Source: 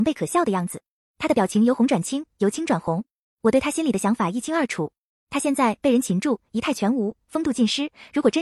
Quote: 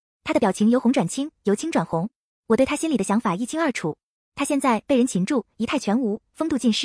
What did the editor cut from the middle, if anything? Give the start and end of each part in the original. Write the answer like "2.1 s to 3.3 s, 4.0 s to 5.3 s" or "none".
none